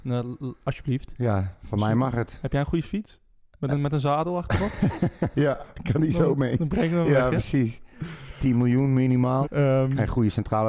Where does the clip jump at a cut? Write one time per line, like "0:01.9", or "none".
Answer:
0:05.3
0:09.4